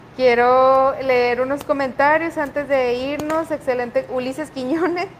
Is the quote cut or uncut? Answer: cut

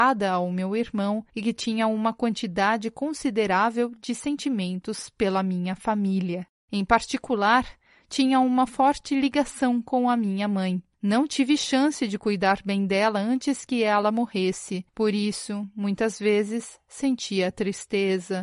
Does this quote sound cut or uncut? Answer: uncut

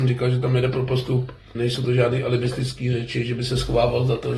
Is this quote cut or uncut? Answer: cut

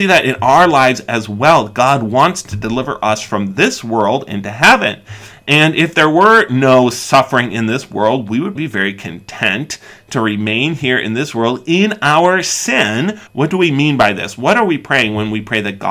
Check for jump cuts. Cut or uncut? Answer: cut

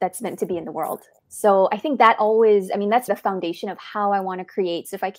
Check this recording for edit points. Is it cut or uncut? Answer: cut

